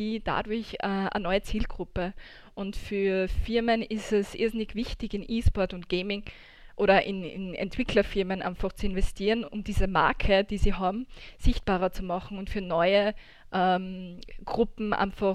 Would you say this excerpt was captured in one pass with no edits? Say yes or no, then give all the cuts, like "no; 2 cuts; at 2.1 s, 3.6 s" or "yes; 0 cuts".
yes; 0 cuts